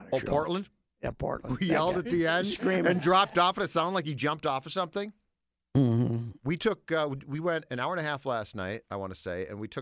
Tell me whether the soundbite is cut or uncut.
uncut